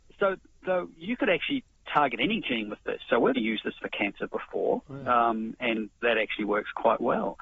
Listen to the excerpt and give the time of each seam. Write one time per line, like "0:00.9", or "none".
0:03.3